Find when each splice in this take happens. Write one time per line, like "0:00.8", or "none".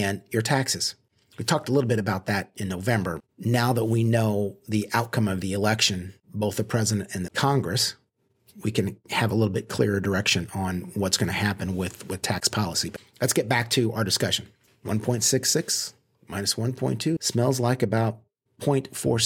0:14.7
0:17.2